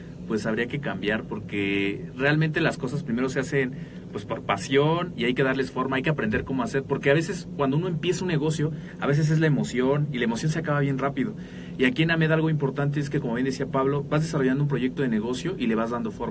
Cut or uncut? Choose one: uncut